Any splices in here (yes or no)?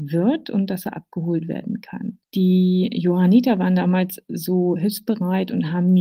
no